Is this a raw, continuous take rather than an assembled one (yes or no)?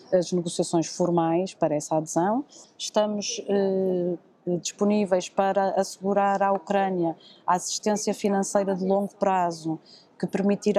no